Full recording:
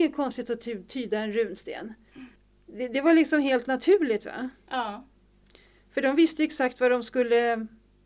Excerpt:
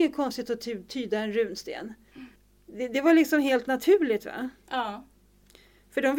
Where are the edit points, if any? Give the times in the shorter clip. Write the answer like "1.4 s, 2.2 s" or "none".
none